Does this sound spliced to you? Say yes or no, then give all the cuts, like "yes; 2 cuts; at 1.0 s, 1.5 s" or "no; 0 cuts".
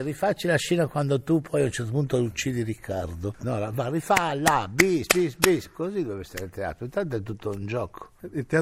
no; 0 cuts